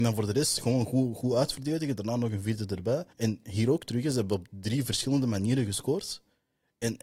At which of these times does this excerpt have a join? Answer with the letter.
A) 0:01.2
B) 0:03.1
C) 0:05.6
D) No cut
B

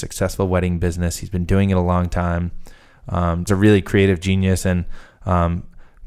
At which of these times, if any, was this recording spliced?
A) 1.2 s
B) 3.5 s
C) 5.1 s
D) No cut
B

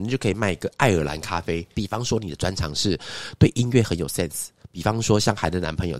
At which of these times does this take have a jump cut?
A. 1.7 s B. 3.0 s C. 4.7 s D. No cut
A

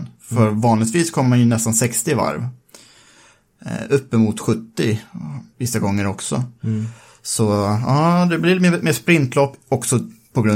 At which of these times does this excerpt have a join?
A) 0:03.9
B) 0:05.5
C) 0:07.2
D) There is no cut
B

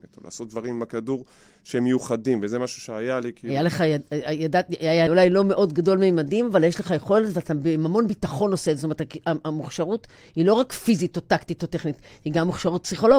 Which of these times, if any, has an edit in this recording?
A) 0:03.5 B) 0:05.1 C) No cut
B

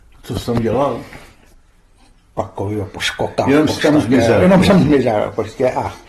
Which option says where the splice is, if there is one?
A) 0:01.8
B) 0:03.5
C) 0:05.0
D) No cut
D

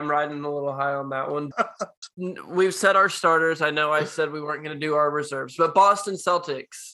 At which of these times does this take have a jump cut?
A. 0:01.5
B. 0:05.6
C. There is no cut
A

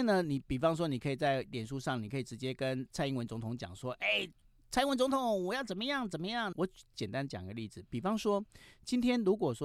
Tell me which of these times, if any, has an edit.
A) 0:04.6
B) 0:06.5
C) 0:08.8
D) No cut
B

